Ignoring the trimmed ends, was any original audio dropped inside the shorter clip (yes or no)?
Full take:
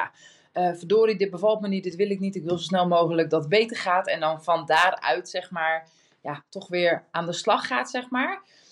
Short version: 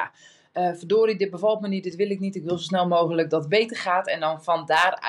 no